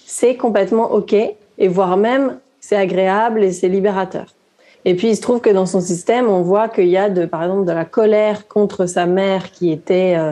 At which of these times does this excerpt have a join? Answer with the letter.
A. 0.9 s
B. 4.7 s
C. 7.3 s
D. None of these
B